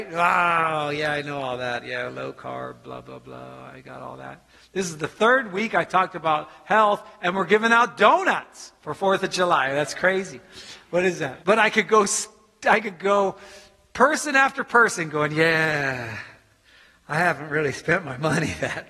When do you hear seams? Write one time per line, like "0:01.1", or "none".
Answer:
0:11.4